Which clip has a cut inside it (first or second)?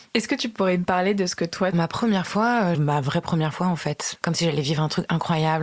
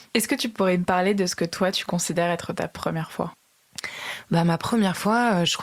first